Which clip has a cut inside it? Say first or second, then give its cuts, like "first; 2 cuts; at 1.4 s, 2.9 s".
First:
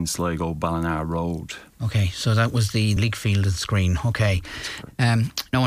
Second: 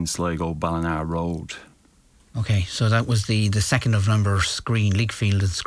first; 2 cuts; at 1.7 s, 3.0 s